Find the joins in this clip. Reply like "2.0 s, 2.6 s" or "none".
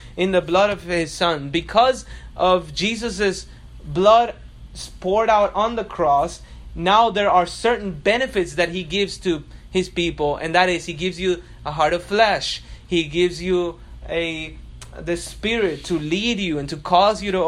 none